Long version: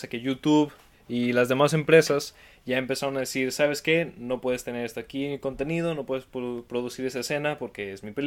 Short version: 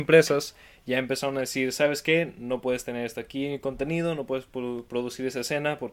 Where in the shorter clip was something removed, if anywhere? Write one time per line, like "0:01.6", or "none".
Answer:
none